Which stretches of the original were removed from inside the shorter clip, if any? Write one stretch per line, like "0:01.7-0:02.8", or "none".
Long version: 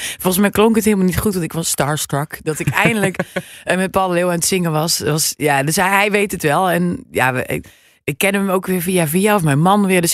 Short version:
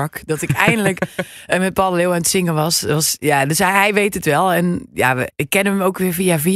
0:07.5-0:08.0